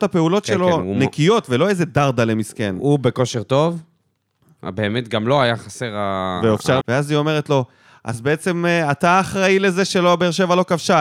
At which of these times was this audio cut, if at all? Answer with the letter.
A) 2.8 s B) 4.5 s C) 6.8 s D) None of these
C